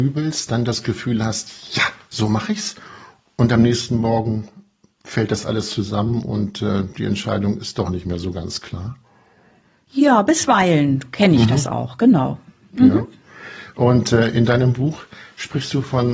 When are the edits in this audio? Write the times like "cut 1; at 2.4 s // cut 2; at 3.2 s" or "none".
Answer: none